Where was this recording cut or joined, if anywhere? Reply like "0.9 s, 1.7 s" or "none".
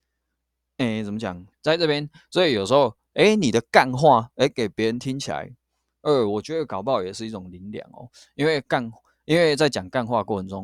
1.5 s